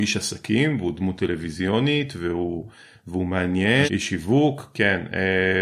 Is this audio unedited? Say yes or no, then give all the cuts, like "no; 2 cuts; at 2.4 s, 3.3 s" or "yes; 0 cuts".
no; 1 cut; at 3.9 s